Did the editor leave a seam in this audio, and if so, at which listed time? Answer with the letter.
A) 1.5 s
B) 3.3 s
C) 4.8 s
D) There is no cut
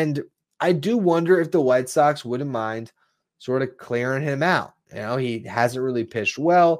D